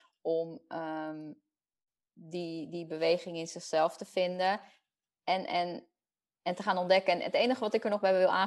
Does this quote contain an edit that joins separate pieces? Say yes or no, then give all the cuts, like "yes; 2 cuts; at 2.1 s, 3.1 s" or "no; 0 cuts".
no; 0 cuts